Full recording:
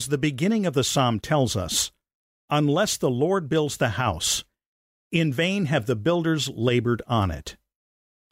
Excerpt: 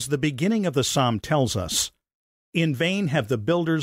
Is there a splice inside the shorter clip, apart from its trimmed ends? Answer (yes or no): yes